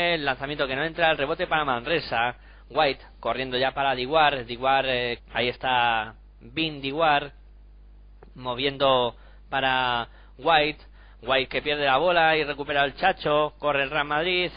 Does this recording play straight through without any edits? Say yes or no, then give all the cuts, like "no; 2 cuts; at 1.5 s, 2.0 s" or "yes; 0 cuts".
no; 1 cut; at 5.2 s